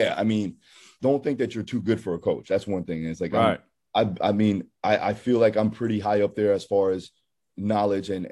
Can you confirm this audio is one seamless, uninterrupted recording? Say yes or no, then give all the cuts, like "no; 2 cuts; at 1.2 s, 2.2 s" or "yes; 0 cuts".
no; 1 cut; at 1.0 s